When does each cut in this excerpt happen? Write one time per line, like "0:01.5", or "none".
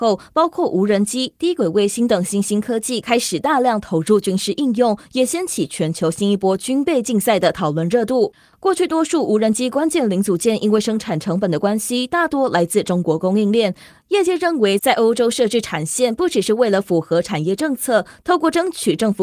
0:13.9